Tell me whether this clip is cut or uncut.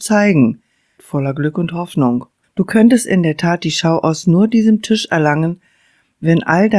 cut